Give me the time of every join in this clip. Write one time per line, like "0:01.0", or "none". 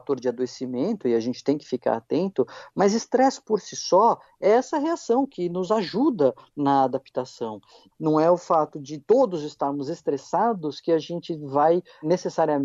0:07.9